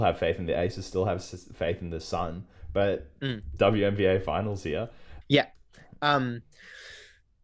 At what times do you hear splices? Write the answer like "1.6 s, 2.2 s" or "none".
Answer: 3.6 s, 5.2 s